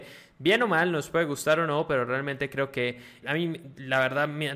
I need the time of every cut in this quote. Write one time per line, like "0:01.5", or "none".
0:03.2